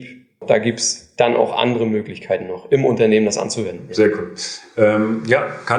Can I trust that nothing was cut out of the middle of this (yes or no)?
yes